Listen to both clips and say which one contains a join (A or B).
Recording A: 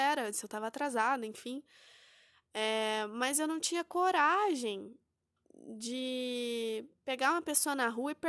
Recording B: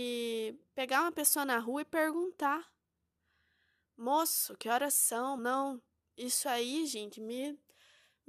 B